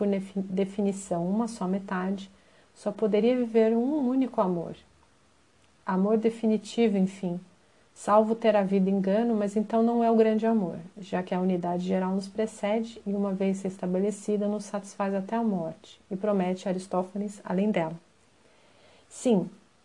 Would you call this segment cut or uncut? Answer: uncut